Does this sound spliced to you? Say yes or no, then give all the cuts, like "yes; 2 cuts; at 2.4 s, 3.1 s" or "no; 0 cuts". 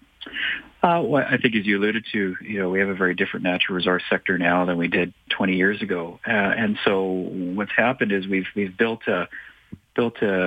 yes; 1 cut; at 5.3 s